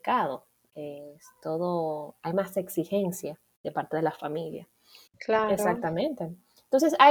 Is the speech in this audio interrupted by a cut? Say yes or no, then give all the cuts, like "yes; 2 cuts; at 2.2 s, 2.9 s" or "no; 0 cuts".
yes; 1 cut; at 5.1 s